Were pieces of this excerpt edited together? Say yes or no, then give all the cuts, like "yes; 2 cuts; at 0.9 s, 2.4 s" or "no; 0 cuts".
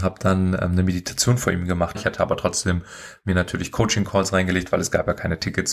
yes; 1 cut; at 1.9 s